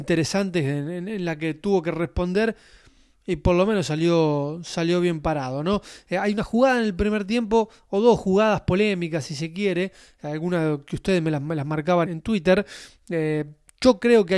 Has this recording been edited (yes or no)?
yes